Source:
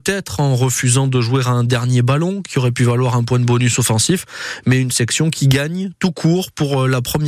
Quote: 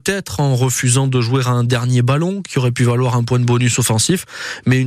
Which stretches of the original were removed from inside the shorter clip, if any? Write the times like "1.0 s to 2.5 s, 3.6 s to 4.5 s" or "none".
none